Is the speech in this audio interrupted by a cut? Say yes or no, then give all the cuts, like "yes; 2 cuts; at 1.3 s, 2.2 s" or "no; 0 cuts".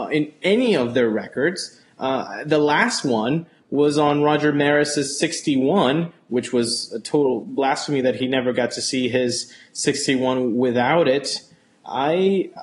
no; 0 cuts